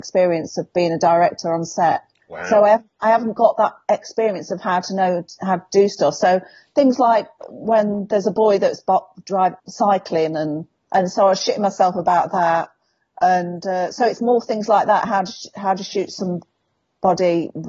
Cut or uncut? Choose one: cut